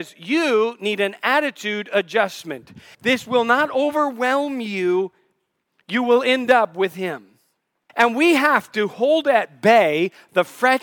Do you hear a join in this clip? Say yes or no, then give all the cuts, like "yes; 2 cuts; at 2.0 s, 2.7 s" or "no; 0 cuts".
yes; 2 cuts; at 2.9 s, 7.9 s